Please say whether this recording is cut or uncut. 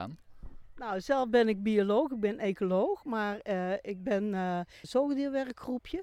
cut